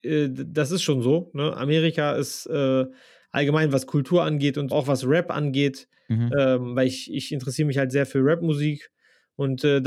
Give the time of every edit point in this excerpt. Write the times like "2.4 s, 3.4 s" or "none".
4.7 s